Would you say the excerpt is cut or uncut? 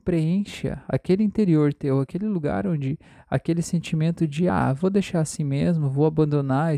uncut